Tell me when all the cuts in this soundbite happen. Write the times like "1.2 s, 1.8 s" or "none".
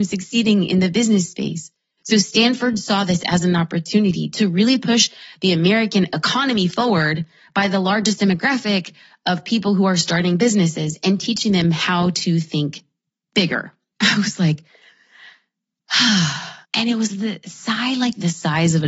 13.9 s, 16.6 s